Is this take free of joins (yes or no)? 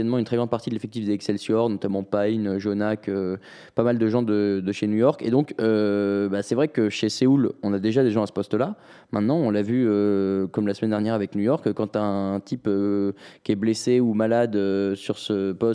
yes